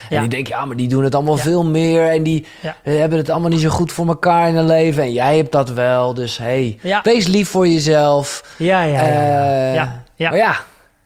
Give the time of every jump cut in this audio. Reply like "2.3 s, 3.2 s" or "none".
none